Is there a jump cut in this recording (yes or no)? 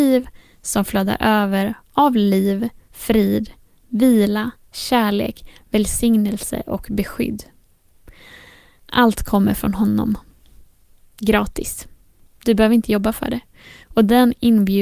no